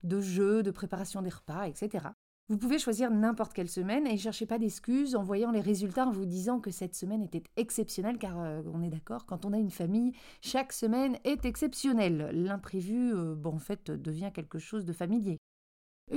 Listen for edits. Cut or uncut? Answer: uncut